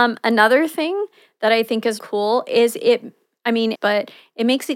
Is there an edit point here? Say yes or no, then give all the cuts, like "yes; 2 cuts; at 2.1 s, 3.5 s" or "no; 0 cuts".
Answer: yes; 2 cuts; at 2.0 s, 3.7 s